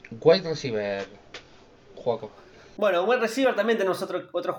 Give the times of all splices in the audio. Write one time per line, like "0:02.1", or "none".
none